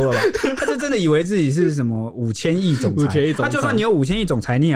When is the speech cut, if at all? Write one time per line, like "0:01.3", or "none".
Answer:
none